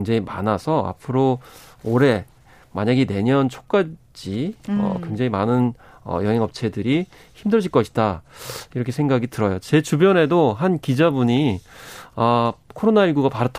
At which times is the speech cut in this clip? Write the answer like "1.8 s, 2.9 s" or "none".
none